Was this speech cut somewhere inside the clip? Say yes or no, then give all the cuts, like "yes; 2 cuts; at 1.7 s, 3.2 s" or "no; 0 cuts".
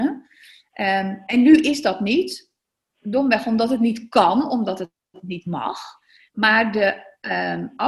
no; 0 cuts